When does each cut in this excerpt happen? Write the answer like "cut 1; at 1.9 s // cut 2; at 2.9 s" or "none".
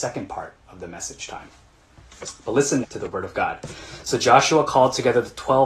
cut 1; at 2.8 s